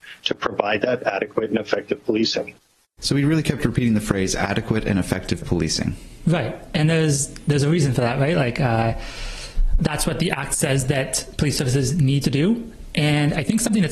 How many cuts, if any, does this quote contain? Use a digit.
1